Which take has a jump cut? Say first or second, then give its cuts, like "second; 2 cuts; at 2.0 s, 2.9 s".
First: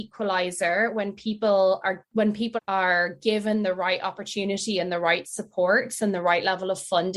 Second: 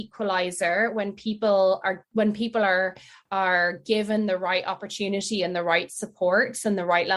first; 1 cut; at 2.6 s